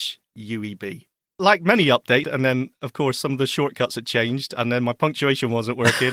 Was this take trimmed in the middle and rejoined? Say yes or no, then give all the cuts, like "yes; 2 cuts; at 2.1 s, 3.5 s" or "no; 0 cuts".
yes; 1 cut; at 2.2 s